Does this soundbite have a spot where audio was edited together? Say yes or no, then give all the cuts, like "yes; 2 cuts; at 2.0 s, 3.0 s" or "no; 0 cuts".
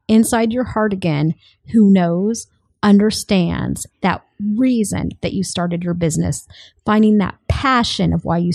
yes; 1 cut; at 3.9 s